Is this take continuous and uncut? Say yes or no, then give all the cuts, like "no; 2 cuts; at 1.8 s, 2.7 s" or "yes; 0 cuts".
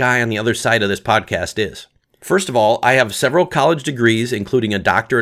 yes; 0 cuts